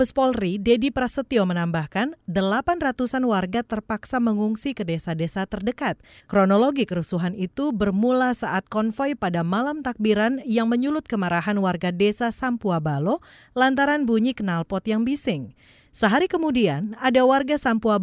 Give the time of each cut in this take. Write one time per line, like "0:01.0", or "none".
0:06.2